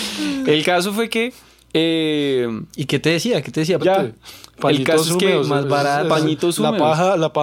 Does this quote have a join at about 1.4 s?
no; 1 cut; at 3.8 s

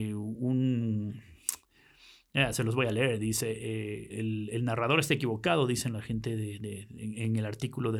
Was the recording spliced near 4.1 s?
yes; 1 cut; at 4.1 s

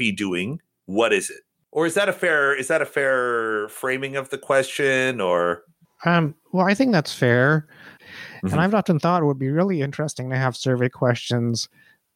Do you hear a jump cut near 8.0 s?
yes; 1 cut; at 8.0 s

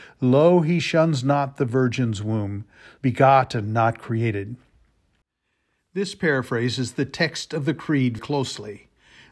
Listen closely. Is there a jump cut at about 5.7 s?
no; 2 cuts; at 3.0 s, 8.2 s

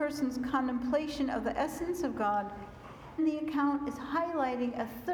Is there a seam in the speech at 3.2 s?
yes; 1 cut; at 3.2 s

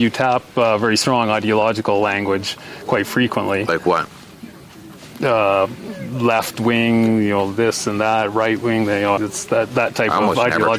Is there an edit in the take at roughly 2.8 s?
no; 1 cut; at 9.2 s

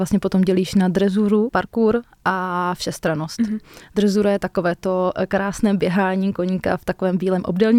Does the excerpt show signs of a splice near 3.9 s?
no; 1 cut; at 1.5 s

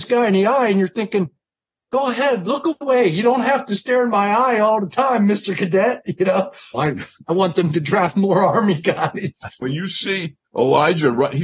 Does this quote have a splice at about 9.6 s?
yes; 2 cuts; at 6.7 s, 9.6 s

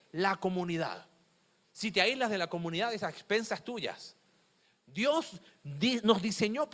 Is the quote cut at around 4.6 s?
no; 0 cuts

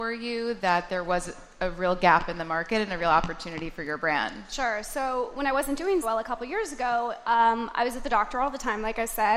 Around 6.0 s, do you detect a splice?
yes; 1 cut; at 6.0 s

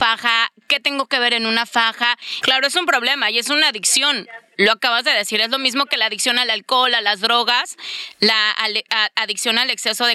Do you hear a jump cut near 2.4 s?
yes; 1 cut; at 2.4 s

